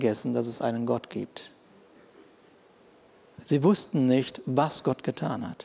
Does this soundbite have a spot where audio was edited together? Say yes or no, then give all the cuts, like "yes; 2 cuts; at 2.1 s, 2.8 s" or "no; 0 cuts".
yes; 1 cut; at 3.4 s